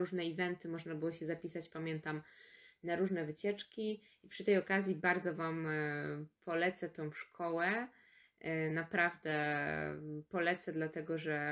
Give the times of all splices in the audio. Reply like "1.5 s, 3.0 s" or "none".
none

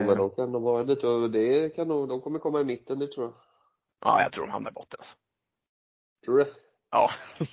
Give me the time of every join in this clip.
2.1 s

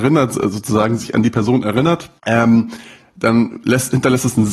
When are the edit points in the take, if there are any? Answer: 2.2 s

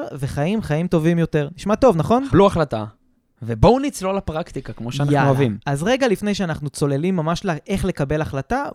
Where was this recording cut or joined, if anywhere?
2.3 s

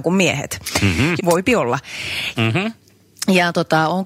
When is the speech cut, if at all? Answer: 1.2 s, 2.3 s

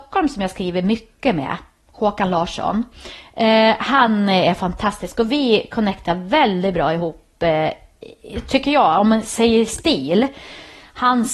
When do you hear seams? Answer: none

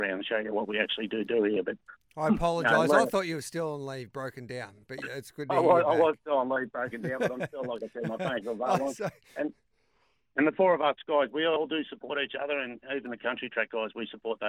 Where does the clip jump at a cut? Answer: none

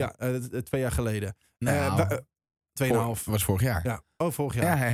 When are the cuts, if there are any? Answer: none

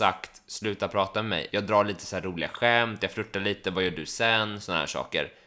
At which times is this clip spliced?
1.5 s

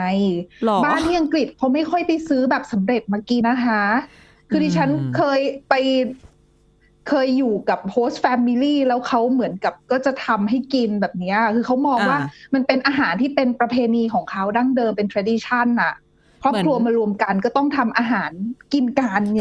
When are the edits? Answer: 3.4 s

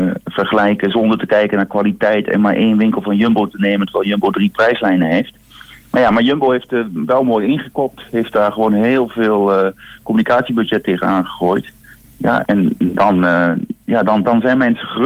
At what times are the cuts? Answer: 12.4 s

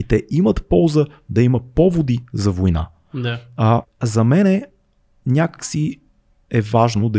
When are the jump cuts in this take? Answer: 3.8 s

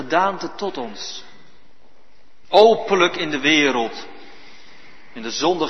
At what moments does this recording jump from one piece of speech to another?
2.4 s

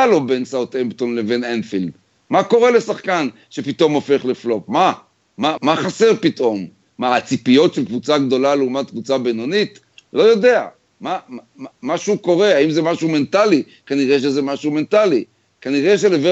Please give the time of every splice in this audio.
5.6 s

